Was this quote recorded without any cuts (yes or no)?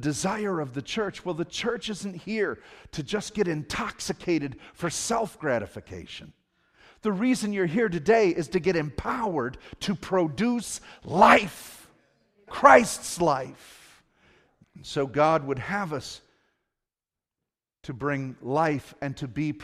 no